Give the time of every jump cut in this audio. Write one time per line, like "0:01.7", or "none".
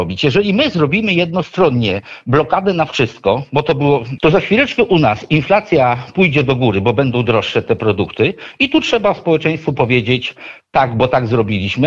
0:04.2